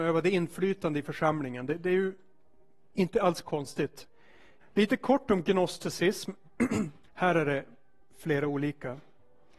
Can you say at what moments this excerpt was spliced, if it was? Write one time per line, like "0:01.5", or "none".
0:04.6
0:07.1

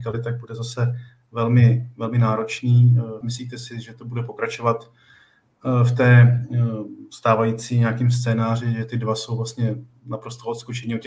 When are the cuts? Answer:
0:03.2

